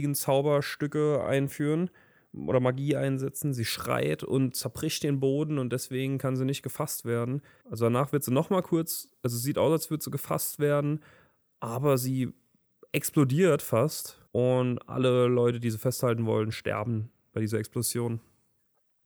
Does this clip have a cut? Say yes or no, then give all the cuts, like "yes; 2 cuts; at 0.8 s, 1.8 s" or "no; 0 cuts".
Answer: yes; 2 cuts; at 7.6 s, 14.3 s